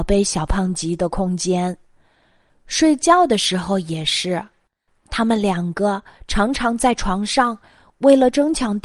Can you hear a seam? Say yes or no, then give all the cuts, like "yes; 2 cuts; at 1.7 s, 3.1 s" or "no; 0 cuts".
no; 0 cuts